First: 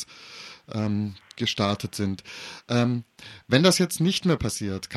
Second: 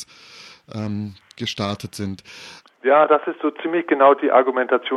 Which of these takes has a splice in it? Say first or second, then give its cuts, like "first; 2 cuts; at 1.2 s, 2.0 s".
second; 1 cut; at 2.6 s